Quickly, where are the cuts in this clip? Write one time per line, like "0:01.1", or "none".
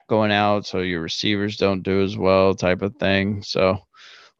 none